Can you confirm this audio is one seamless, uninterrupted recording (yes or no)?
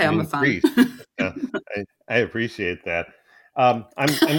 yes